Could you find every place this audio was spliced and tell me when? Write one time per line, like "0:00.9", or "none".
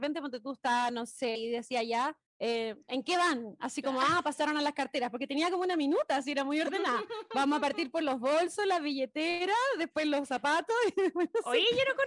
0:01.3